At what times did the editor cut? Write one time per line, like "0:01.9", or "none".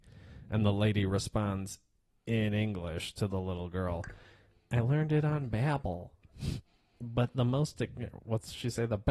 none